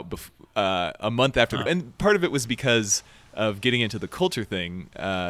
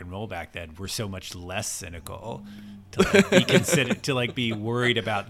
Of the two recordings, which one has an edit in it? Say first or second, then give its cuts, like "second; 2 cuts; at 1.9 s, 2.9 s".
first; 1 cut; at 1.7 s